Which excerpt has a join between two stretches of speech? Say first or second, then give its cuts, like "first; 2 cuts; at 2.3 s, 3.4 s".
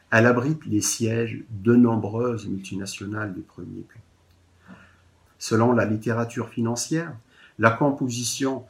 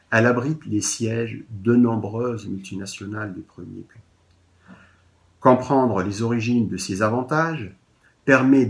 first; 1 cut; at 5.3 s